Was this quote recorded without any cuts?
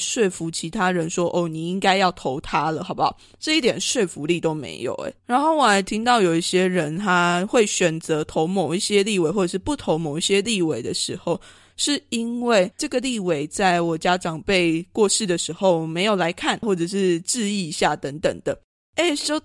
no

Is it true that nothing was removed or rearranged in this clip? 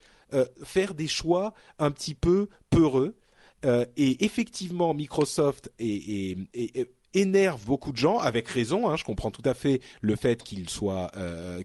yes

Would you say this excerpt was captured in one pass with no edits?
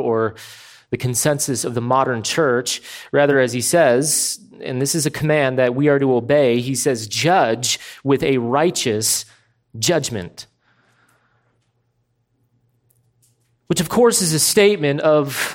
yes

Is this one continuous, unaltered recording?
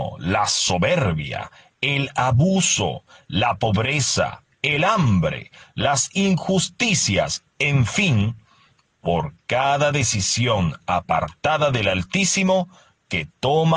no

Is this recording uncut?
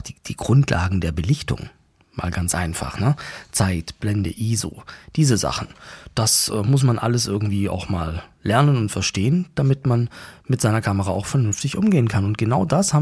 yes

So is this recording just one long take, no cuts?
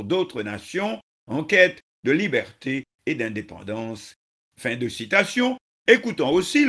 yes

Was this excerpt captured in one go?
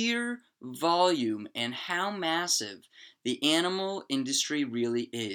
yes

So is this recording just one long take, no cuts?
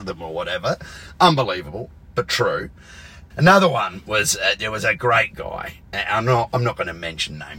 no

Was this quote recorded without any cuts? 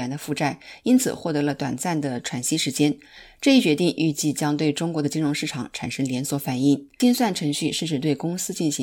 yes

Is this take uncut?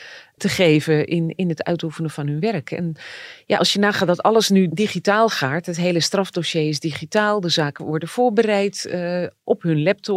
yes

